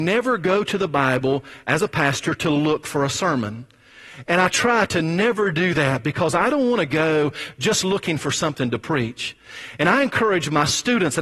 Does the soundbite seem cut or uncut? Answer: uncut